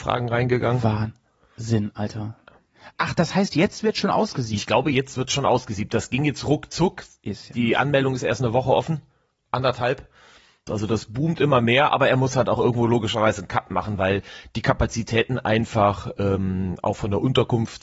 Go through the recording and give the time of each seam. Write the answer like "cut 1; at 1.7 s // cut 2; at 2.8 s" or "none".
cut 1; at 10.7 s